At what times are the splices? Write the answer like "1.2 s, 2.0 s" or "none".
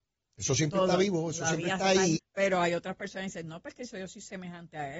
2.2 s

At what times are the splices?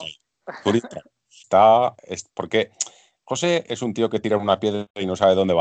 1.4 s, 3.6 s

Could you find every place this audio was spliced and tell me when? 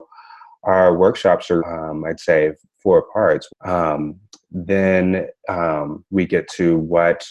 1.6 s, 3.5 s

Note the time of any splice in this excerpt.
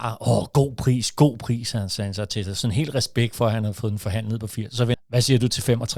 4.9 s

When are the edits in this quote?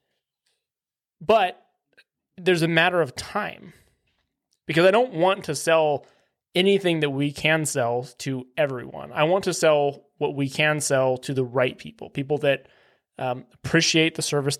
4.5 s

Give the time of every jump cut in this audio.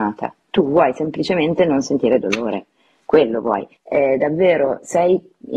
3.8 s

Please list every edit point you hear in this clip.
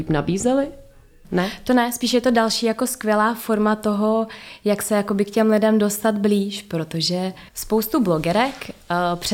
1.2 s, 7.5 s

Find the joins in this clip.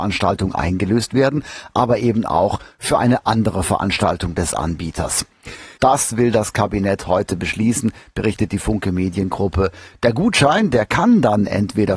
5.8 s

